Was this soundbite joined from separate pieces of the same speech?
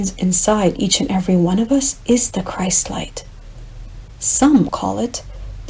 yes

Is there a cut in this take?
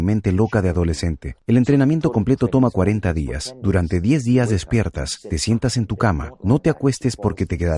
yes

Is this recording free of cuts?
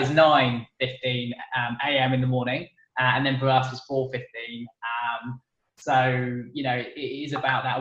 yes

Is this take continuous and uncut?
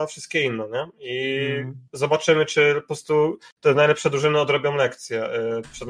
yes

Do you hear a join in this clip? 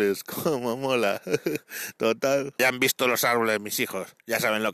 yes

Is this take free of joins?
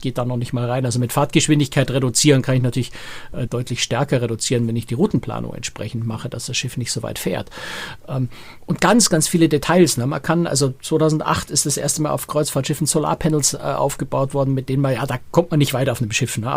no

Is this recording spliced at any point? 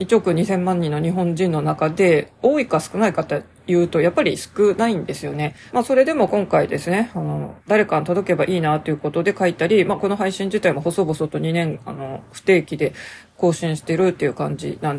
yes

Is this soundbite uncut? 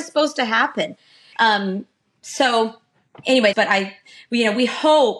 no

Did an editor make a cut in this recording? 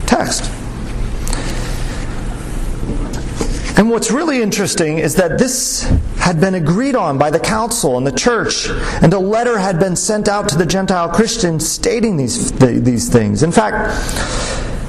no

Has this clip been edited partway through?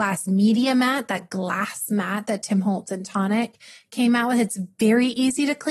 no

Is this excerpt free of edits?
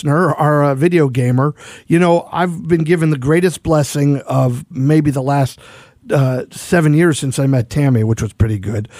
no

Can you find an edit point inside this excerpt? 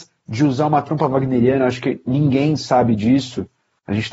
no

